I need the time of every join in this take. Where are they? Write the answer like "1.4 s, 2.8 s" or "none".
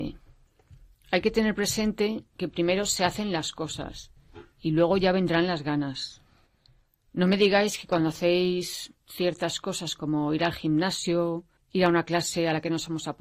none